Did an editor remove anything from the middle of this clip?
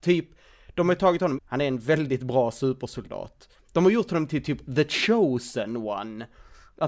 yes; 2 cuts; at 1.4 s, 3.6 s

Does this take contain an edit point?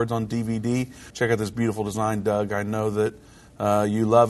yes; 1 cut; at 1.1 s

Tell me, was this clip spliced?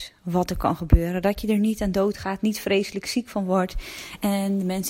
no; 0 cuts

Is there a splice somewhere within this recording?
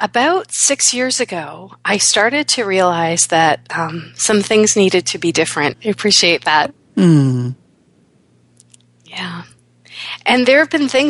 yes; 1 cut; at 5.7 s

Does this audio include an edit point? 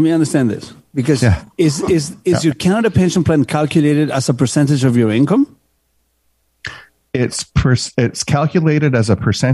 no; 0 cuts

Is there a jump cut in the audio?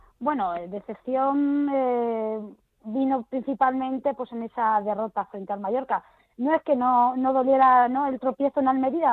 no; 0 cuts

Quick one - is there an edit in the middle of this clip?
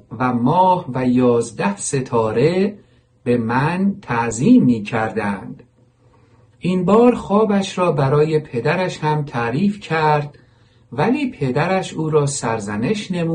no; 0 cuts

